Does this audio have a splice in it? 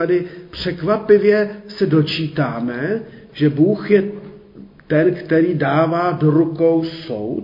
no; 0 cuts

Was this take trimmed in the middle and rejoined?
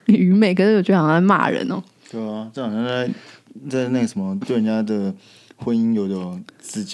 no; 0 cuts

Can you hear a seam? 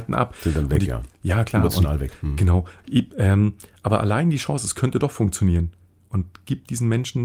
yes; 1 cut; at 3.1 s

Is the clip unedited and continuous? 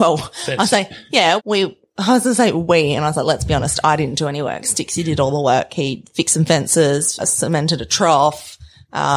no; 2 cuts; at 1.4 s, 7.2 s

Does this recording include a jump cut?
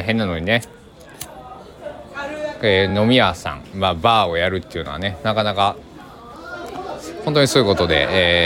no; 0 cuts

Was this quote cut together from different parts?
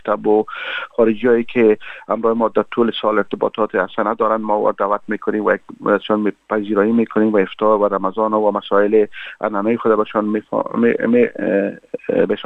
no; 0 cuts

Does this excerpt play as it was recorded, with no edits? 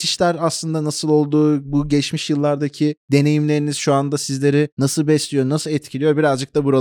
yes; 0 cuts

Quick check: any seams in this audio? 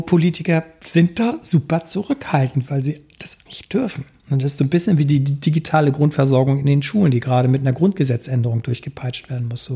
yes; 2 cuts; at 3.5 s, 4.6 s

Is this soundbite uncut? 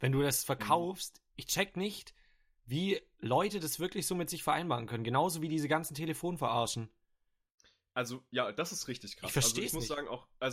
yes; 0 cuts

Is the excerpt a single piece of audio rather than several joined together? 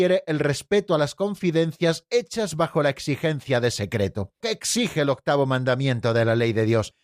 no; 1 cut; at 4.4 s

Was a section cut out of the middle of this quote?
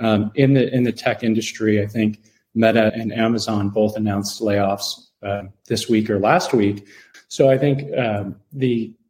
yes; 2 cuts; at 2.9 s, 7.1 s

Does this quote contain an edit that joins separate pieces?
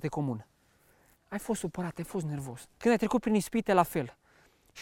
yes; 2 cuts; at 1.1 s, 2.8 s

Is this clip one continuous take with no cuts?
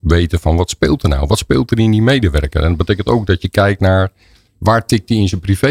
yes; 0 cuts

